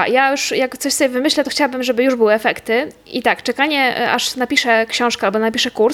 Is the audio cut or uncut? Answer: uncut